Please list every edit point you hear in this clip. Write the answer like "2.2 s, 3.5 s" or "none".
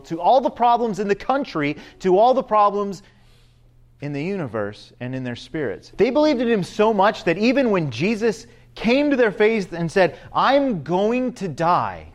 5.9 s